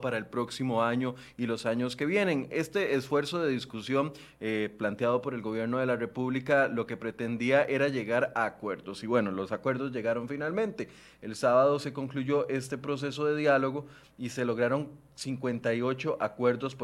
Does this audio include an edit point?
no; 0 cuts

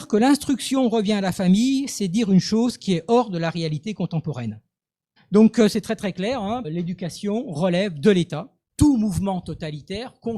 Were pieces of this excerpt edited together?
yes; 3 cuts; at 5.2 s, 6.6 s, 8.7 s

